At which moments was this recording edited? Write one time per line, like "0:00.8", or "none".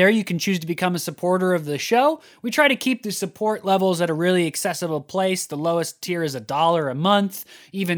none